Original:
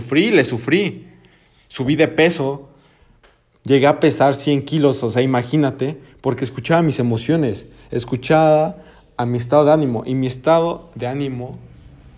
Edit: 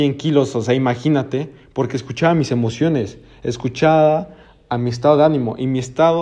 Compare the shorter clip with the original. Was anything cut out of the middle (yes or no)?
no